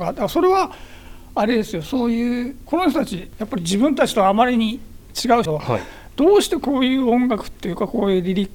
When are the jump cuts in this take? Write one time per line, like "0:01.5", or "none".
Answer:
0:05.5